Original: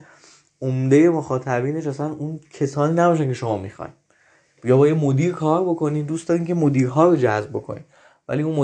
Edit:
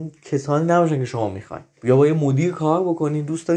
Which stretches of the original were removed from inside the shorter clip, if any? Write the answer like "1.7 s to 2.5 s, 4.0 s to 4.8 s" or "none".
4.0 s to 4.5 s